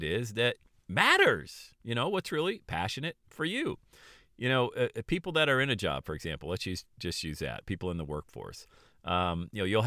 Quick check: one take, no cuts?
yes; 0 cuts

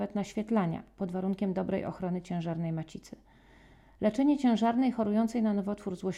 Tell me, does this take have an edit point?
no; 0 cuts

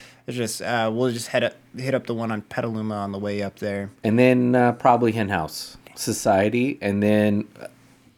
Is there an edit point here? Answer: yes; 1 cut; at 5.9 s

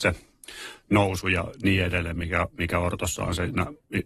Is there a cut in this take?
no; 0 cuts

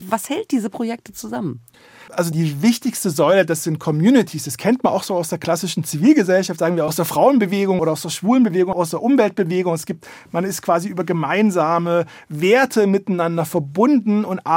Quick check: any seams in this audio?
no; 0 cuts

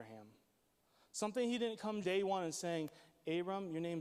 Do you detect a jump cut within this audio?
yes; 1 cut; at 2.0 s

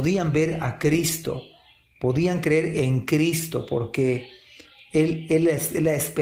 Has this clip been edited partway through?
no; 0 cuts

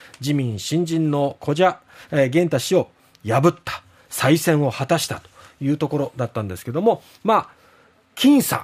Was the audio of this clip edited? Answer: no; 0 cuts

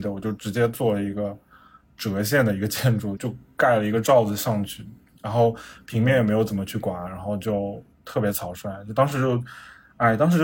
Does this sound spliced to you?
yes; 2 cuts; at 3.2 s, 7.9 s

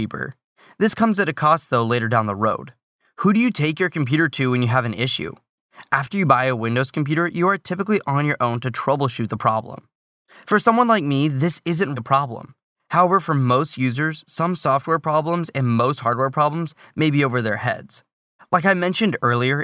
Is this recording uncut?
no; 2 cuts; at 12.0 s, 18.4 s

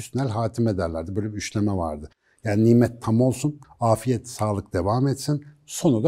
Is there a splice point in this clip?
yes; 1 cut; at 3.6 s

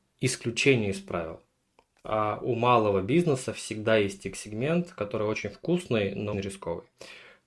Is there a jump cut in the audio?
yes; 1 cut; at 6.3 s

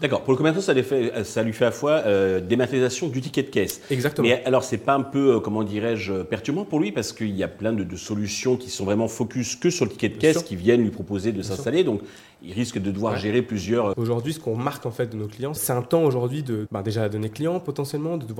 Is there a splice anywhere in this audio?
yes; 3 cuts; at 13.9 s, 15.6 s, 16.7 s

